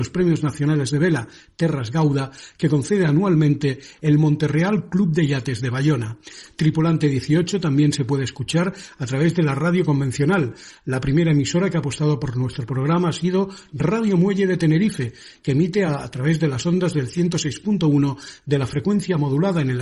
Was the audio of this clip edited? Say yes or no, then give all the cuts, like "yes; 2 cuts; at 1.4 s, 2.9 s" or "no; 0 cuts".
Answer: no; 0 cuts